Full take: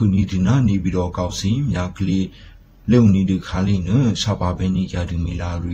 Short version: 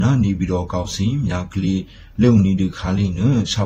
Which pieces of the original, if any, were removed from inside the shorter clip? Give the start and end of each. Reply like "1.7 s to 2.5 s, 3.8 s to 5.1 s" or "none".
2.6 s to 2.8 s